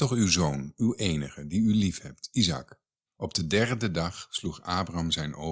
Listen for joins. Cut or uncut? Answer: cut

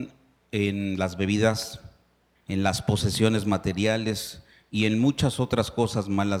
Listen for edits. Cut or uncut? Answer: cut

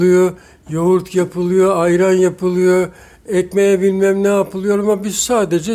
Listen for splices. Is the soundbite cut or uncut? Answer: uncut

